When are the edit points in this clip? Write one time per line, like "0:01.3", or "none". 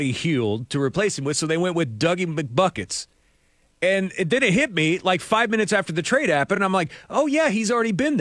none